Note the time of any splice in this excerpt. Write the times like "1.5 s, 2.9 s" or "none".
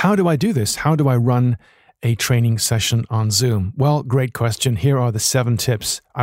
none